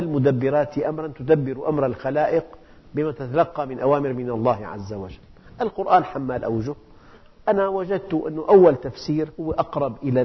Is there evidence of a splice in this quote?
no; 0 cuts

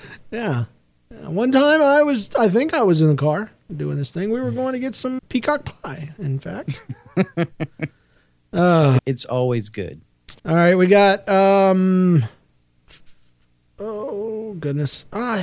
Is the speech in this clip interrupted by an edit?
yes; 3 cuts; at 5.2 s, 9.0 s, 10.4 s

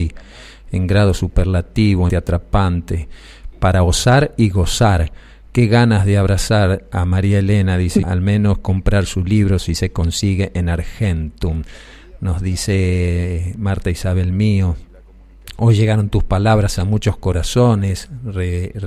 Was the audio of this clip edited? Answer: yes; 3 cuts; at 2.1 s, 3.5 s, 8.0 s

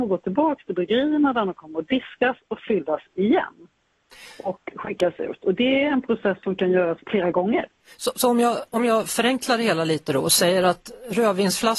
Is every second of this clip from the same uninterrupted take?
no; 1 cut; at 7.0 s

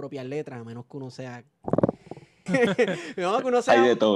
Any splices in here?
yes; 1 cut; at 2.5 s

